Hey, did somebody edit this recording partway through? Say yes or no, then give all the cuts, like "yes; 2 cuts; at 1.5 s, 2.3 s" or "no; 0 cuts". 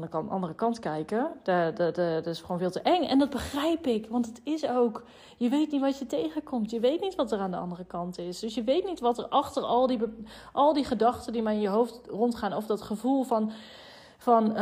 no; 0 cuts